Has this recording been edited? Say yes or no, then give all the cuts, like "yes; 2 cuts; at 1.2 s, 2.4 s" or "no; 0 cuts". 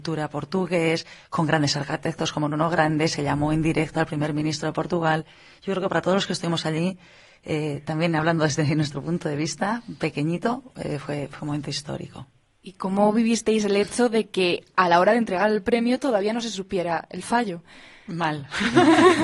no; 0 cuts